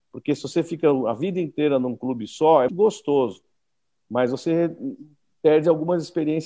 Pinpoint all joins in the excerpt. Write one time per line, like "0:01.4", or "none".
0:02.7